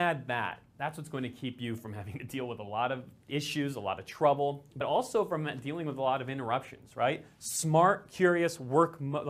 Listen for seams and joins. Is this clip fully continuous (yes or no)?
yes